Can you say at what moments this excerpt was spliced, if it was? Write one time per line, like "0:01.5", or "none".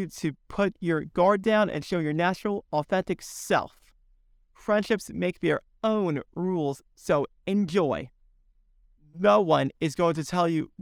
0:04.3
0:09.0